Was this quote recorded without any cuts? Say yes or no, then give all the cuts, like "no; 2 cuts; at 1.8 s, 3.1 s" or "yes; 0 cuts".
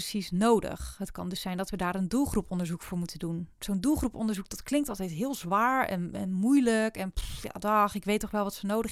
yes; 0 cuts